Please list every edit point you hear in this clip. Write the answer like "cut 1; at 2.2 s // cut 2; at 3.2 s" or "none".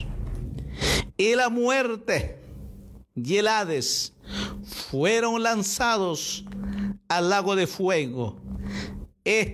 cut 1; at 1.1 s